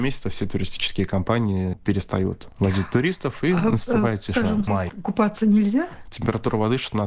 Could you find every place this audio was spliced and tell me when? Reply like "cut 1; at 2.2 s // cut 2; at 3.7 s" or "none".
cut 1; at 4.7 s // cut 2; at 6.0 s